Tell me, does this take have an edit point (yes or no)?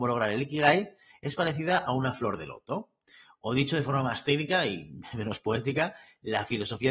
no